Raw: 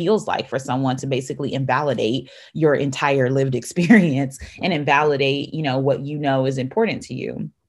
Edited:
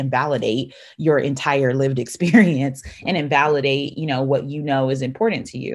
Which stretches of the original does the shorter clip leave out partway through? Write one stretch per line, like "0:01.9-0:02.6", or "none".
none